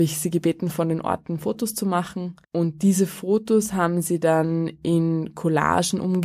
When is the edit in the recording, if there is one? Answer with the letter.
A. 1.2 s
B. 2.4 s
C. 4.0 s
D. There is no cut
B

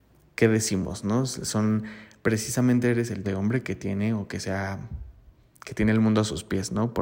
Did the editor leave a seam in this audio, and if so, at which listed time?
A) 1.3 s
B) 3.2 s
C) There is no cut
B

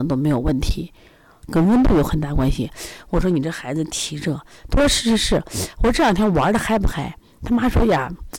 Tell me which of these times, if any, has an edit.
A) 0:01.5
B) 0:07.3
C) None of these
A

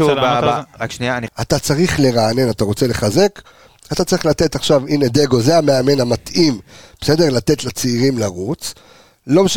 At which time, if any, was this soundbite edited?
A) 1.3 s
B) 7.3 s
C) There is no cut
A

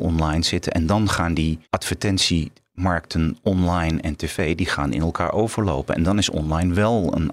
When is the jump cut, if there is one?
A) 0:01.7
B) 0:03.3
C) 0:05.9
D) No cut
A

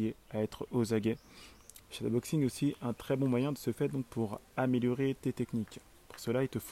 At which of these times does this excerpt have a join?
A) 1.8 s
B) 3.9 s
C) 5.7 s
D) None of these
A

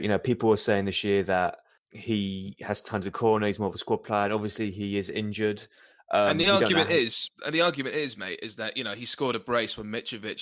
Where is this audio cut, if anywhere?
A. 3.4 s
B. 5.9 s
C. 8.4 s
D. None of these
D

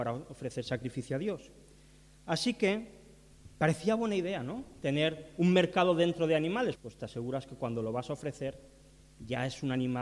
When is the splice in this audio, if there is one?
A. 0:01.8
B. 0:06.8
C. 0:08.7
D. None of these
B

